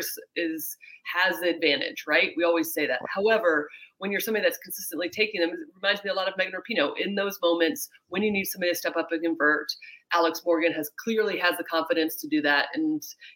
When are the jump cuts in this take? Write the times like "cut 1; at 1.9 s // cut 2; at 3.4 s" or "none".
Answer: none